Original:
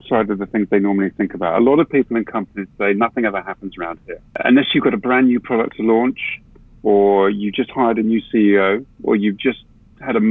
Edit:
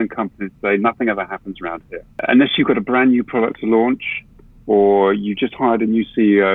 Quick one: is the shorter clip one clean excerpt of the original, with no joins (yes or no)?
yes